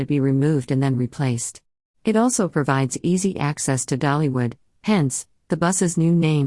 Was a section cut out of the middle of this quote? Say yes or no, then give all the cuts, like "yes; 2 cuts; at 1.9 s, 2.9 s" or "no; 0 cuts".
yes; 2 cuts; at 1.9 s, 4.7 s